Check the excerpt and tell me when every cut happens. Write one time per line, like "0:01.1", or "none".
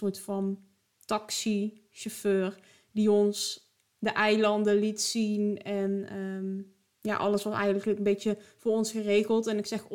none